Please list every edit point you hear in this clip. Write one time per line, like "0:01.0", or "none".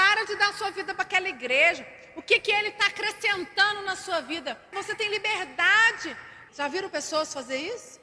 0:04.7
0:06.5